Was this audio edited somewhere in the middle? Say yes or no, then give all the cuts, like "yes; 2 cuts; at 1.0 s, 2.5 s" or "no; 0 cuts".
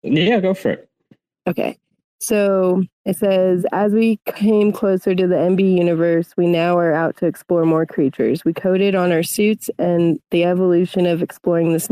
no; 0 cuts